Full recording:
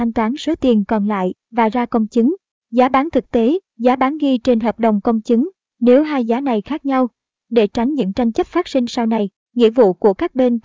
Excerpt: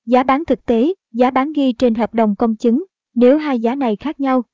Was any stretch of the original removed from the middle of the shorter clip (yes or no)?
no